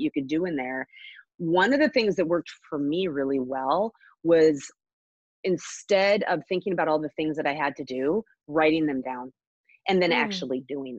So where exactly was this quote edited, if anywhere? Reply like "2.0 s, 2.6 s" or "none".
none